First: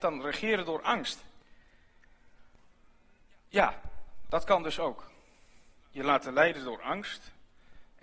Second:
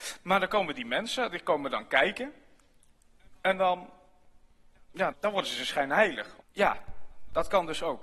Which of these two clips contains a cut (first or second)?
second